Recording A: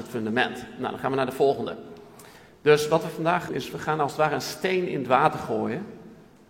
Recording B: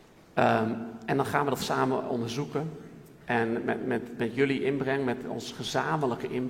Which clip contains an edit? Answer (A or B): A